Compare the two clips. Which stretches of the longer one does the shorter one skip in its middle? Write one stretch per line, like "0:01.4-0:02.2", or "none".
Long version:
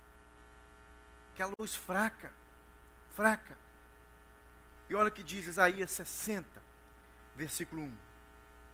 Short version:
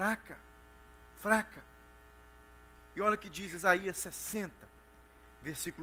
none